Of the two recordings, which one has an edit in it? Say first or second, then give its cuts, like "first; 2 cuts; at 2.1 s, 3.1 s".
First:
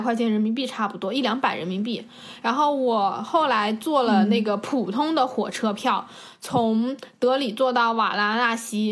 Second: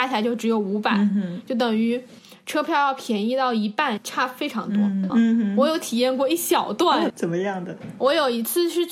second; 2 cuts; at 5.1 s, 7.1 s